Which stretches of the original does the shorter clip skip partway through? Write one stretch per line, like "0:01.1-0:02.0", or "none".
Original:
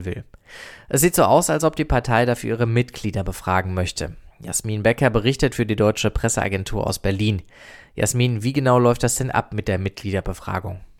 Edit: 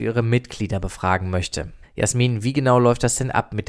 0:04.3-0:07.8